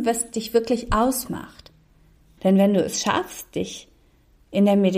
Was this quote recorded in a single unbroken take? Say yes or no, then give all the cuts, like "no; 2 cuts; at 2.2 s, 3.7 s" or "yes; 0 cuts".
no; 1 cut; at 2.4 s